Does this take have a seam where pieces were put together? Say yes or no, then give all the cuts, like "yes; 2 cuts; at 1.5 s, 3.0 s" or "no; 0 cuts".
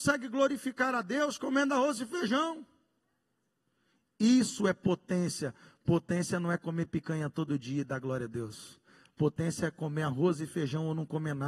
no; 0 cuts